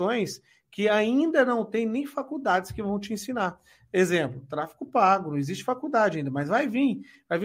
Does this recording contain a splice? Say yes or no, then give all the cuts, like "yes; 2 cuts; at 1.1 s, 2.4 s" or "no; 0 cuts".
no; 0 cuts